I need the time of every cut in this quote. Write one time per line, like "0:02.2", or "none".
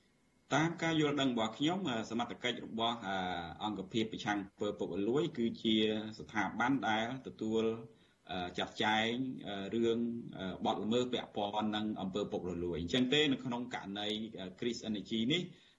none

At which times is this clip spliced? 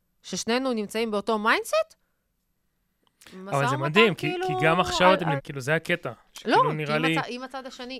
0:05.4

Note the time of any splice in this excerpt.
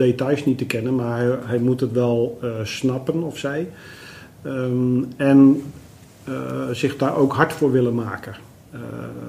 none

